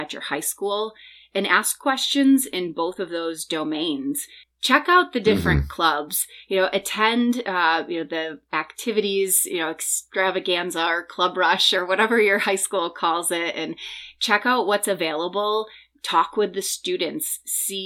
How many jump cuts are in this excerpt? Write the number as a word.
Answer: one